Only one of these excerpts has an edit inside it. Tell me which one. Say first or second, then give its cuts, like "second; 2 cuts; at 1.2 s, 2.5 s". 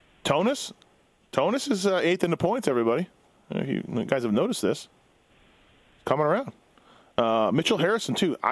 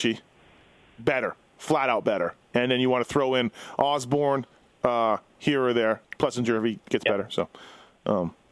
second; 1 cut; at 6.0 s